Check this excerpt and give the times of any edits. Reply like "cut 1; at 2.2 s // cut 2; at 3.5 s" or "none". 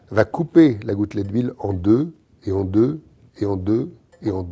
none